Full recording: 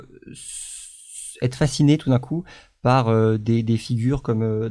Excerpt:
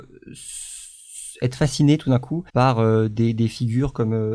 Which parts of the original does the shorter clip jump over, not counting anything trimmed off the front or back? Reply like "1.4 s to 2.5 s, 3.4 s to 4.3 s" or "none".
2.5 s to 2.8 s